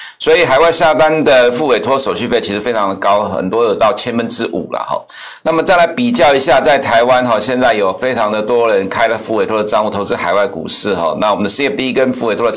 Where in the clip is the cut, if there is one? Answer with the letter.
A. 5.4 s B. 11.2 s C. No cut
A